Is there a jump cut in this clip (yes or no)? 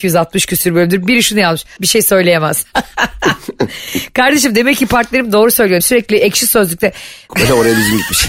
yes